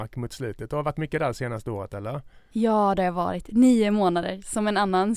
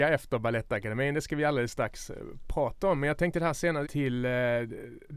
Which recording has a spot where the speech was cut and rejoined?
second; 1 cut; at 3.8 s

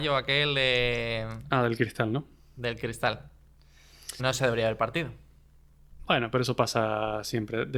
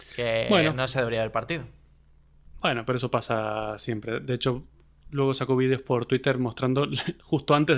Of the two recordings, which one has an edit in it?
first; 1 cut; at 4.2 s

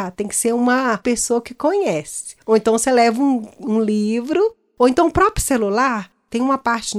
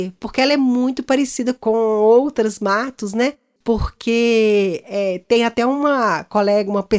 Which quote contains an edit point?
second; 1 cut; at 3.6 s

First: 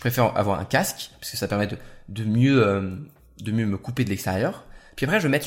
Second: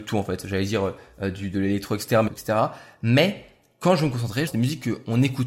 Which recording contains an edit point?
second; 2 cuts; at 2.3 s, 4.5 s

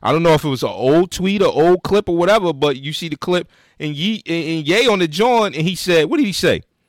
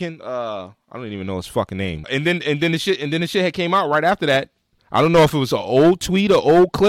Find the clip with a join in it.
second; 1 cut; at 2.0 s

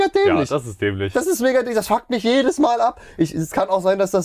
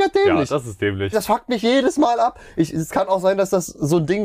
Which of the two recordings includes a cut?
second; 1 cut; at 1.1 s

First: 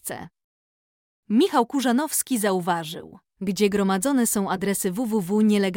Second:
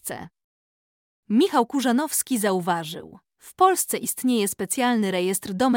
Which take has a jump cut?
first; 1 cut; at 3.3 s

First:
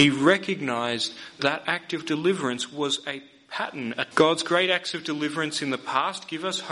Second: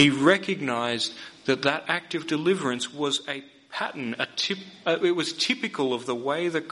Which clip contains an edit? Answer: first; 2 cuts; at 1.4 s, 4.1 s

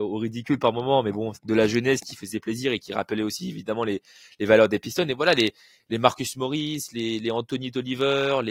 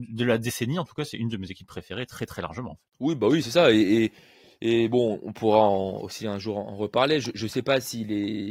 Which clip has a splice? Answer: first; 1 cut; at 1.3 s

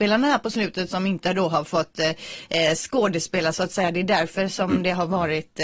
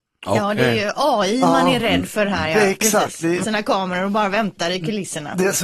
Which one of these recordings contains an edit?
second; 1 cut; at 3.4 s

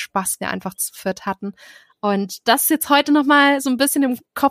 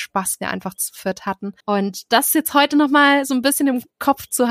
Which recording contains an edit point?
second; 1 cut; at 1.6 s

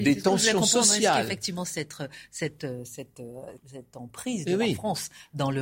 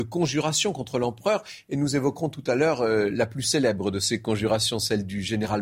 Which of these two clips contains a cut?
first; 1 cut; at 3.6 s

